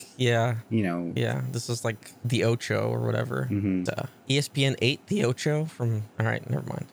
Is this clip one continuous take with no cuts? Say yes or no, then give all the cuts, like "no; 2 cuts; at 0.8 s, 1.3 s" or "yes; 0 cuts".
no; 1 cut; at 3.9 s